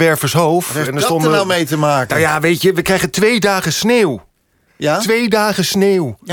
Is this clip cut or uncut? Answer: uncut